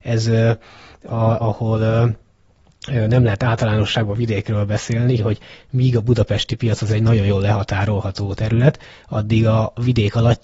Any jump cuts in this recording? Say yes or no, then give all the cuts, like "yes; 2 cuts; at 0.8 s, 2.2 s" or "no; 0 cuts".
yes; 2 cuts; at 1.4 s, 5.2 s